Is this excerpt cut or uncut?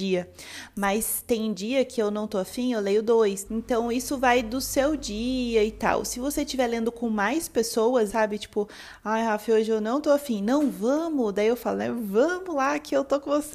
cut